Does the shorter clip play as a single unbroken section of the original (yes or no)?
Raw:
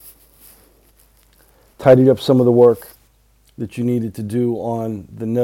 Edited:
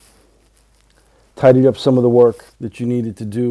no